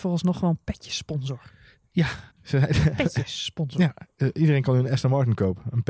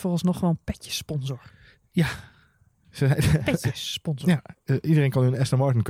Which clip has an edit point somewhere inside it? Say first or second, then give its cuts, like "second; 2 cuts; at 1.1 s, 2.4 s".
first; 1 cut; at 2.3 s